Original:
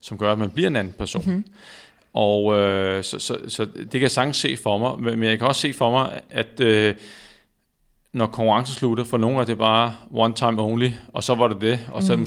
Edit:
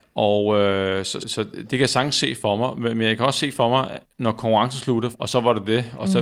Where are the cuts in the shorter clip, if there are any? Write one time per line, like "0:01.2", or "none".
0:01.2
0:04.0
0:05.1